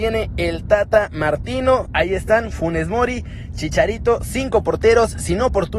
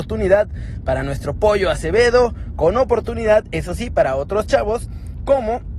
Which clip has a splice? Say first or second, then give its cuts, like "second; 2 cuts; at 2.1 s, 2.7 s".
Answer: first; 1 cut; at 1.9 s